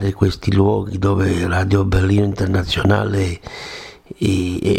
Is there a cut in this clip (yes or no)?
no